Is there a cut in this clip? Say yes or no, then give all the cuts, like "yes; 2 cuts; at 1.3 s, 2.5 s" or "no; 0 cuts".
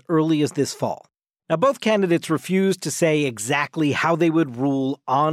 no; 0 cuts